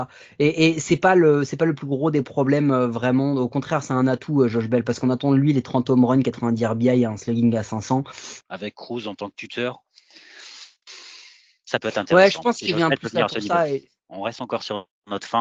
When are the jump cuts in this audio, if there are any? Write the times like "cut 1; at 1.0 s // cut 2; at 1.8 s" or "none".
cut 1; at 8.4 s // cut 2; at 14.0 s